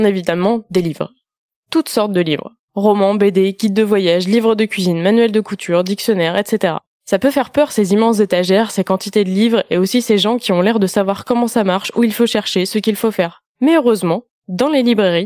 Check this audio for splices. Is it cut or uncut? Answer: uncut